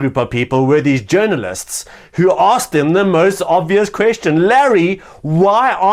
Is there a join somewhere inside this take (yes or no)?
no